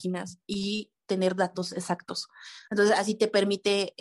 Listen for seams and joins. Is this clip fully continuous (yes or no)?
yes